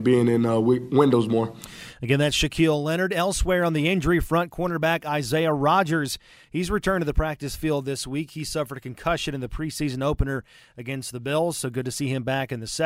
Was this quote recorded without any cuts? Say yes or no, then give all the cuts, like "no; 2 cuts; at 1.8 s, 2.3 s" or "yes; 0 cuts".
yes; 0 cuts